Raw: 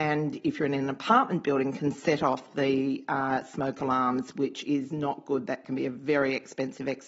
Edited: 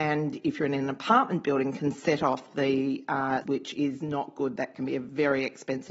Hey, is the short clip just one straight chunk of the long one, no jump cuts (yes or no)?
no